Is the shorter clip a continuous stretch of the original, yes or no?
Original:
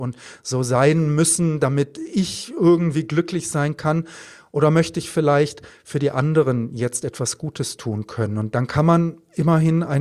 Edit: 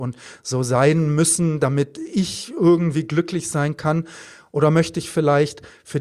yes